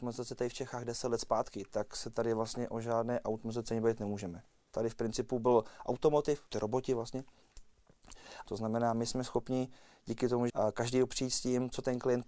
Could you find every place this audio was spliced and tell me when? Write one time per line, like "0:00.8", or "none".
0:06.5
0:08.5
0:10.5